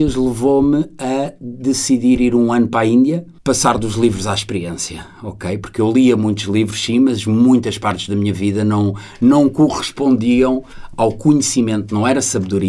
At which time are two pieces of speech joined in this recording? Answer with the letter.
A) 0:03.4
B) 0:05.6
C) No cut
A